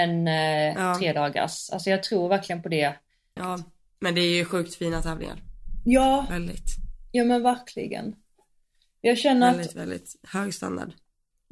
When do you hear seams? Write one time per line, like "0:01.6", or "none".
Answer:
0:03.4